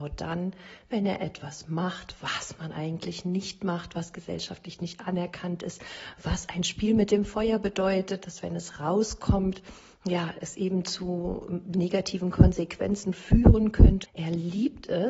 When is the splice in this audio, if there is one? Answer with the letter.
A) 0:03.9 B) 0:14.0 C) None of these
B